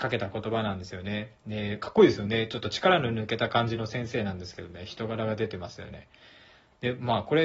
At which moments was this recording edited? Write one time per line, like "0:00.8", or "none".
none